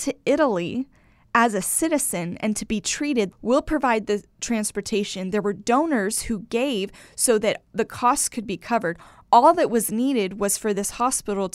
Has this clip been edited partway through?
yes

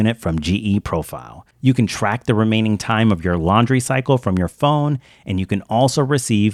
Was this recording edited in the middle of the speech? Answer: no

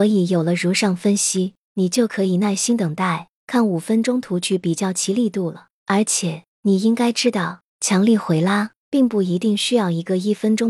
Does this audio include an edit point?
no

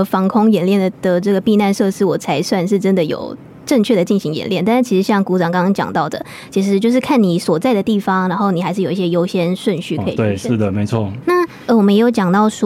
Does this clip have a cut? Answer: yes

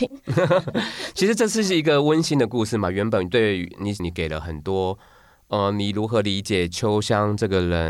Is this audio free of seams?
no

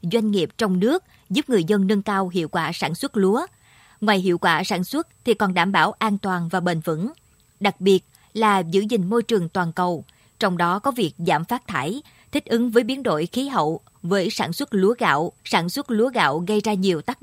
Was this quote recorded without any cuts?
no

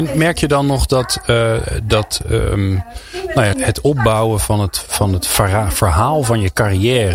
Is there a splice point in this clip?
yes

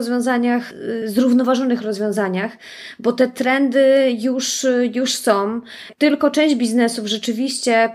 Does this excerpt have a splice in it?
no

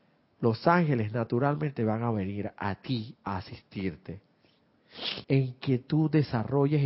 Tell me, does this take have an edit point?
yes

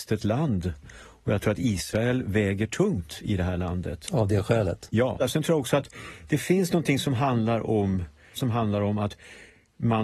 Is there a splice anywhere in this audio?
yes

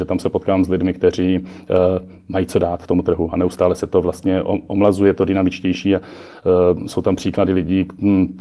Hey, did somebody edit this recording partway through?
no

